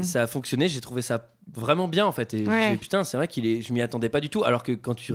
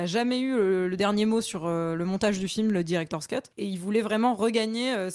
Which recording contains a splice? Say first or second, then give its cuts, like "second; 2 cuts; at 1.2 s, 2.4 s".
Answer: second; 1 cut; at 3.5 s